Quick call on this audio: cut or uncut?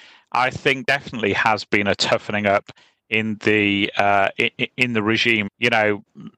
cut